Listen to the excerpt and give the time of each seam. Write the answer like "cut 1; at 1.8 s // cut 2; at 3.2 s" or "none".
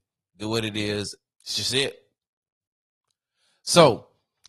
cut 1; at 1.3 s